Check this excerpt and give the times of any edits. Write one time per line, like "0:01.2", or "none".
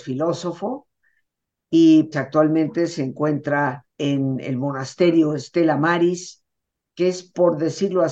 0:02.1
0:03.9